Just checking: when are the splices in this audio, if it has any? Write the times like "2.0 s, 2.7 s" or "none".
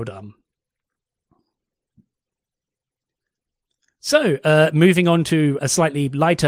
5.6 s